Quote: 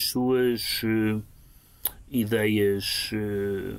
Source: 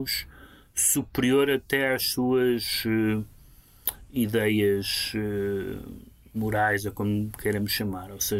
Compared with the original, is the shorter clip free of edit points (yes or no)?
yes